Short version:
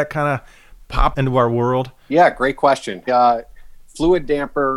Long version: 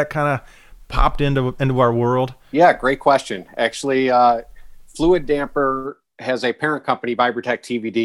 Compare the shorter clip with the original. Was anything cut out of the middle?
yes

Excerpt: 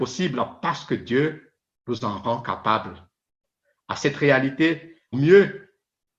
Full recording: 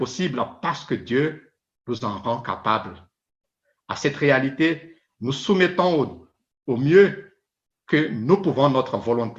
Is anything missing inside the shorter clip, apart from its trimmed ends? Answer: yes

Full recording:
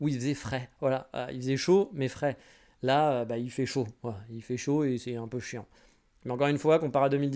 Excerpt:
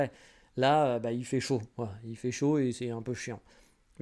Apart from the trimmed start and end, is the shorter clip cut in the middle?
no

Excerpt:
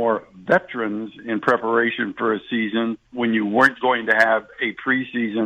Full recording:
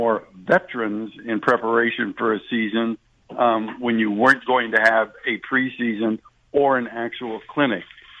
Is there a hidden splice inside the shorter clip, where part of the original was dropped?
yes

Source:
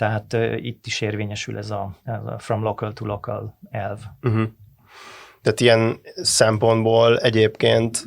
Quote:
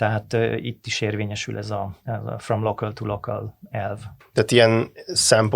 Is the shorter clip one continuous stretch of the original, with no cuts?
no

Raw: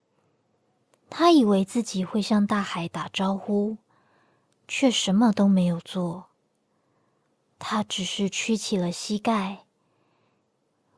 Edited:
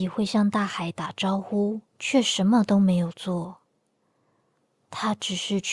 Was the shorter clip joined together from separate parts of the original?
yes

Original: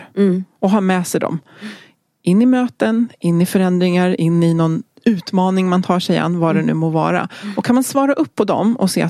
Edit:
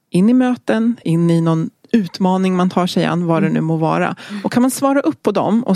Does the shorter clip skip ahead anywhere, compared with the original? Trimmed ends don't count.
yes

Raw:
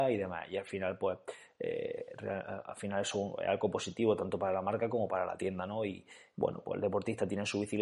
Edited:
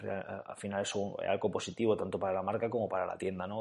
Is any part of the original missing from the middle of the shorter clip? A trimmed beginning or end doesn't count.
no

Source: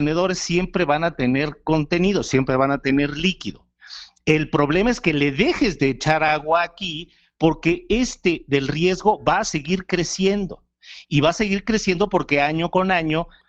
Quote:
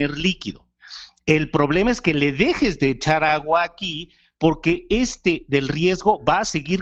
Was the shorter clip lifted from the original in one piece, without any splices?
yes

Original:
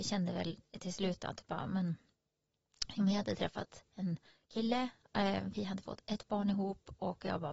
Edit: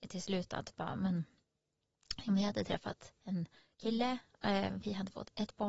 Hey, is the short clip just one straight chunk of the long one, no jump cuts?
yes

